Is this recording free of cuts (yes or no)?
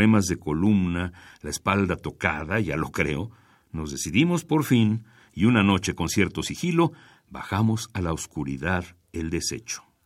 yes